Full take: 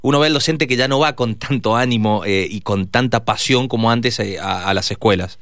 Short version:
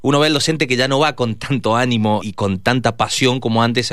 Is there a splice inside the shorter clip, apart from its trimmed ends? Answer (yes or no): yes